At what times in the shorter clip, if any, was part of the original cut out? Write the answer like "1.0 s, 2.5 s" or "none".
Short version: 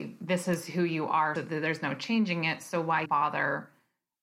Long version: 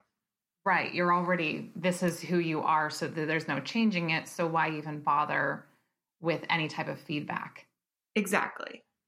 1.4 s, 3.1 s

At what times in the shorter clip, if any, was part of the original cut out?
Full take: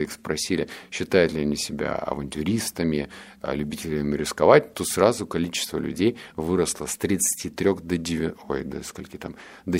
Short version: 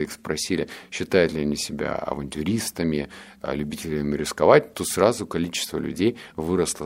none

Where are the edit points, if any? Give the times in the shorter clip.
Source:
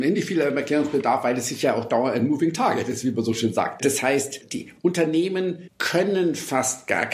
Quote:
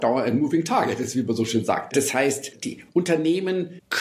none

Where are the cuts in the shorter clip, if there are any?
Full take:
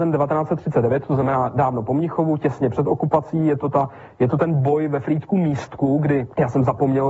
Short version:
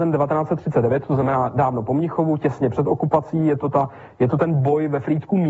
none

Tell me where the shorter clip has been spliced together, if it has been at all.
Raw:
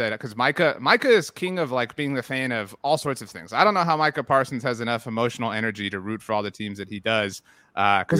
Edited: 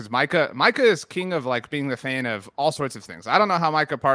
none

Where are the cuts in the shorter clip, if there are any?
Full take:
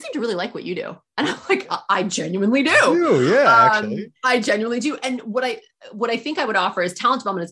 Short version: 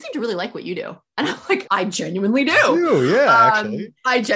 1.7 s

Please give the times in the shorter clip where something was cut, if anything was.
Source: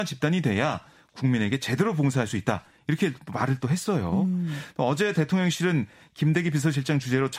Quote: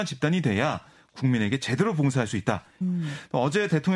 2.8 s

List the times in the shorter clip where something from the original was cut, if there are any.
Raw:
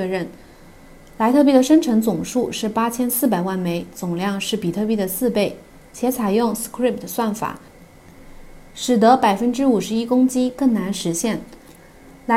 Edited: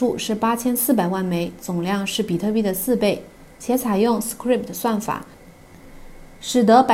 none

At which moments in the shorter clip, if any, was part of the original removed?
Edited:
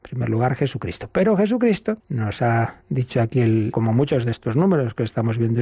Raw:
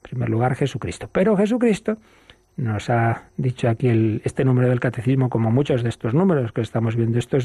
2.0 s, 3.7 s

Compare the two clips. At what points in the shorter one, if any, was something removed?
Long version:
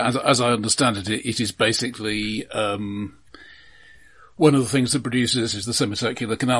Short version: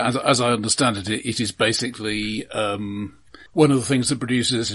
3.5 s

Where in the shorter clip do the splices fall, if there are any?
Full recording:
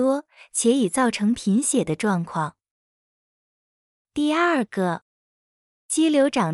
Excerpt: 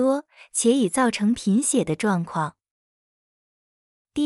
none

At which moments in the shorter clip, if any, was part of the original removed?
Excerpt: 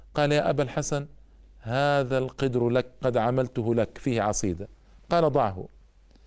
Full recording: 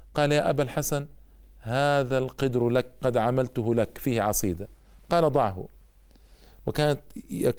none

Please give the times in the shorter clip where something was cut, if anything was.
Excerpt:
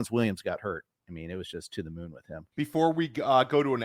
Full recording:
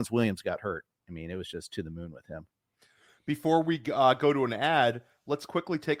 2.5 s

